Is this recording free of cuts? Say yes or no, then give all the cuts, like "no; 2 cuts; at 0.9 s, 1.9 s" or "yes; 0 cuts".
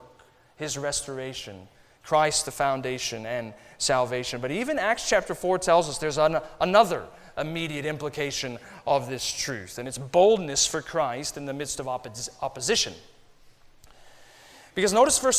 yes; 0 cuts